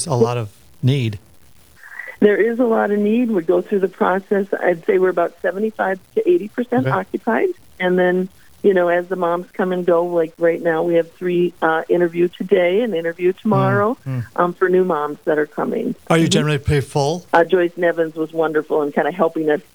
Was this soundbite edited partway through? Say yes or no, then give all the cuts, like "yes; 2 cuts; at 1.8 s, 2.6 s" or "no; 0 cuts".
yes; 2 cuts; at 16.0 s, 17.3 s